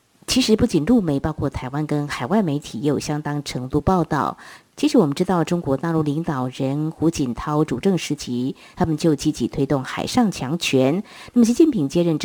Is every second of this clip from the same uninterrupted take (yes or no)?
no